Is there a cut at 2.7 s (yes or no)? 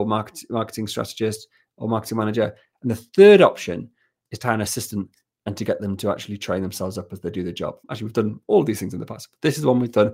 no